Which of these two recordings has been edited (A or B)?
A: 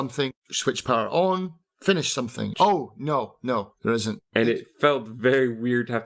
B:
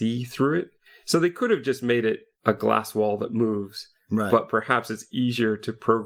A